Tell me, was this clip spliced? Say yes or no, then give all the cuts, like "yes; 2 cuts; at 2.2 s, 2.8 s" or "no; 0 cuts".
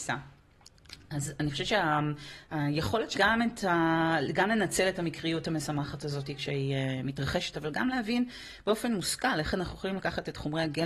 yes; 1 cut; at 3.1 s